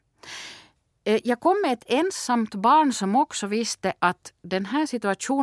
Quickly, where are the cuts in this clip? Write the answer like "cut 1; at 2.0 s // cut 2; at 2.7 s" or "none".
none